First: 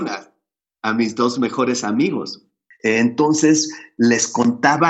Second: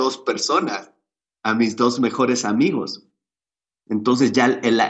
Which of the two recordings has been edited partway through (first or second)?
first